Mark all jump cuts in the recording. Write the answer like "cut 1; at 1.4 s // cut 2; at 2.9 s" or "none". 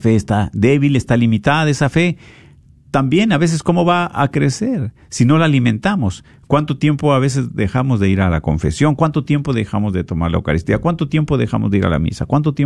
none